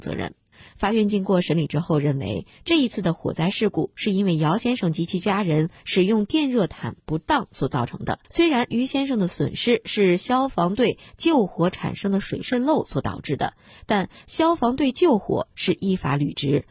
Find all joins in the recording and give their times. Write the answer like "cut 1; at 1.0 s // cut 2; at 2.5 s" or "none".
cut 1; at 8.2 s